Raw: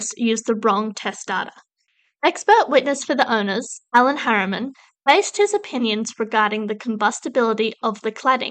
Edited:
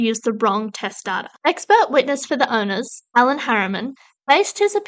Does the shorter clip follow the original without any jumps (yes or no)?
no